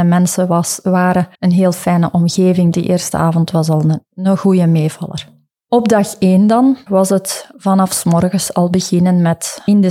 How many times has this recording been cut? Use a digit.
3